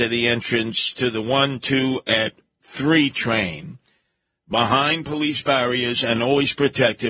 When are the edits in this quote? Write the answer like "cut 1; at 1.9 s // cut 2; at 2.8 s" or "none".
none